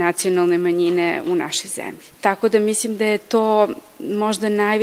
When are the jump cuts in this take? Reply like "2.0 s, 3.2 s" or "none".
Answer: 2.1 s